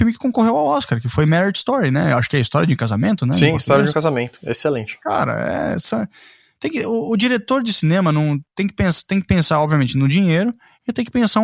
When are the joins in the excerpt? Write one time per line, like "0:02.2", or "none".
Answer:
none